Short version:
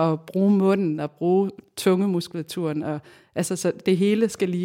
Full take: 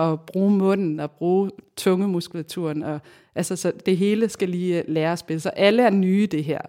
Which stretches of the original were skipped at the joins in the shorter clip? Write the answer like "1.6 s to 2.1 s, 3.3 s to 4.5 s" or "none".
none